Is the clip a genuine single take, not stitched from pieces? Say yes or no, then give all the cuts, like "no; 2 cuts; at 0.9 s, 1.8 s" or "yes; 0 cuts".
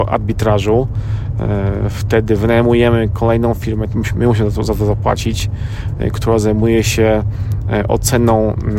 yes; 0 cuts